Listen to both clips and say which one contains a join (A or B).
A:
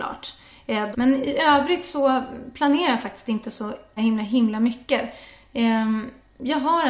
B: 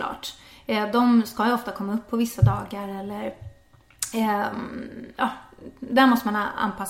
A